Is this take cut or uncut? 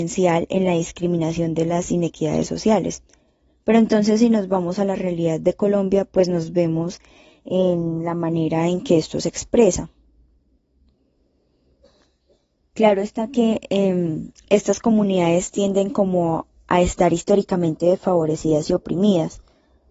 cut